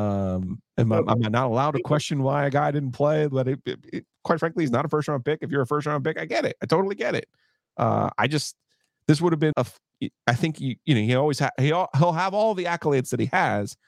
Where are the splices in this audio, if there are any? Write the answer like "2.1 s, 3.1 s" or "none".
9.5 s